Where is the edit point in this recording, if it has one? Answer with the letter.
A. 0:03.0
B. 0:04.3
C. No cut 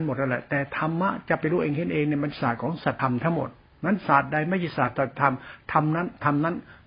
A